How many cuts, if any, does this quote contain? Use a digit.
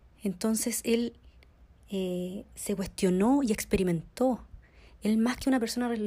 0